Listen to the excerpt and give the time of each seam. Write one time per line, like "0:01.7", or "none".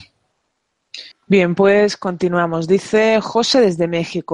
0:01.1